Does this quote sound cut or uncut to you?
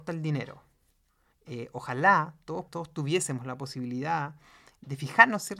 cut